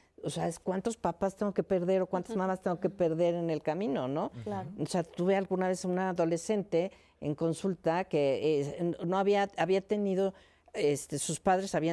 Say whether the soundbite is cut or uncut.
uncut